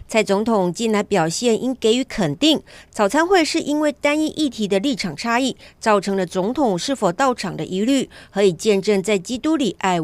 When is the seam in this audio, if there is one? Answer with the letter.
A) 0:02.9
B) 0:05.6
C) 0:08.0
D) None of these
D